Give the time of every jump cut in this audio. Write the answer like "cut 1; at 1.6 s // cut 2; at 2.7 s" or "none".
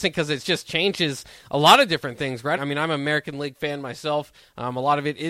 cut 1; at 2.6 s